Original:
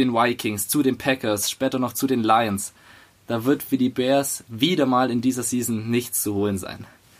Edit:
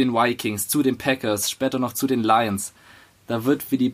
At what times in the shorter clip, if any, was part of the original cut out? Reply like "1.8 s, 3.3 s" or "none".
none